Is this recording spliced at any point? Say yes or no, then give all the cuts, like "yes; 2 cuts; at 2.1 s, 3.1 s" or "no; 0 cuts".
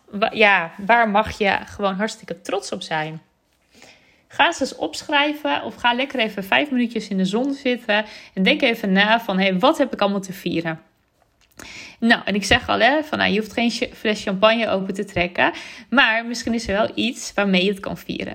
no; 0 cuts